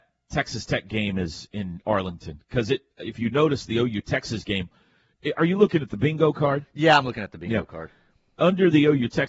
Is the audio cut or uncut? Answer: uncut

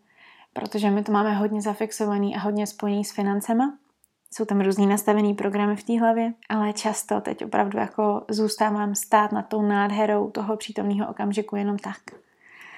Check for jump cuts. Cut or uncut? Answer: cut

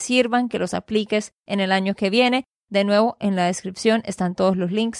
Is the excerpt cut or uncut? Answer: uncut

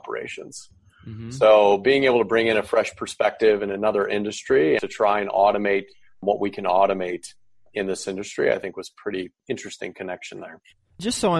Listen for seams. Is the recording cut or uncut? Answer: uncut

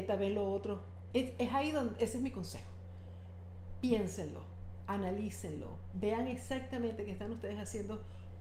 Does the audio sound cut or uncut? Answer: cut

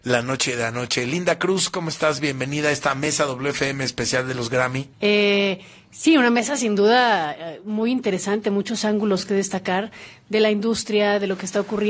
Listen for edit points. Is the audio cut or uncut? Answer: cut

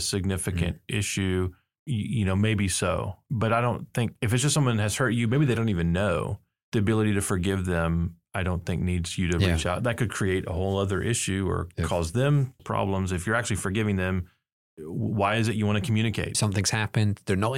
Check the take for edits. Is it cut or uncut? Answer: cut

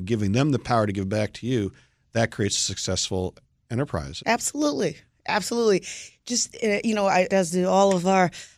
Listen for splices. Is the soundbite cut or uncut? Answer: cut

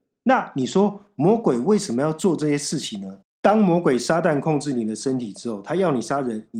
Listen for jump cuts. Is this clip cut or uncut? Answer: cut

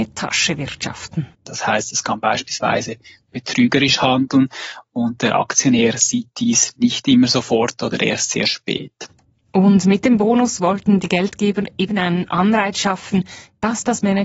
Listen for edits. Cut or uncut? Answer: cut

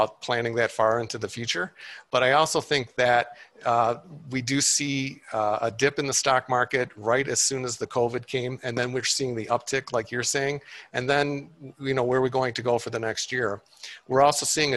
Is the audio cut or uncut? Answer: uncut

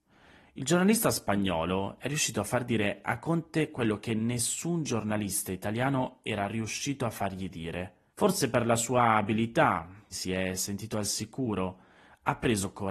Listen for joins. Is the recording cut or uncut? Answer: cut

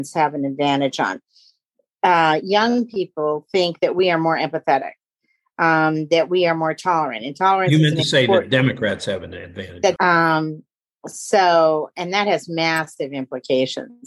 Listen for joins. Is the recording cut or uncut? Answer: cut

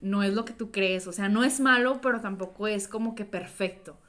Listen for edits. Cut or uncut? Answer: uncut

